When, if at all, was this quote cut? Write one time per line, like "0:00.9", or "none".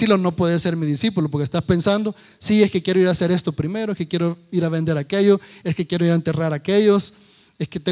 none